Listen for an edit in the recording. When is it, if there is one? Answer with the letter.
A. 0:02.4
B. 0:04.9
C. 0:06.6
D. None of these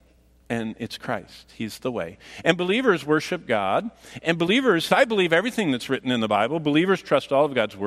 B